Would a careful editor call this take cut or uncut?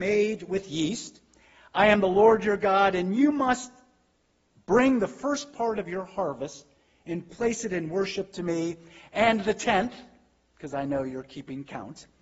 uncut